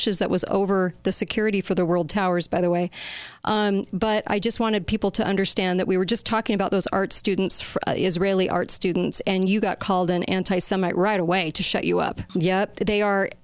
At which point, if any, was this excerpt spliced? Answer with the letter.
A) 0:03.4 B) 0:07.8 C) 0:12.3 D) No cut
C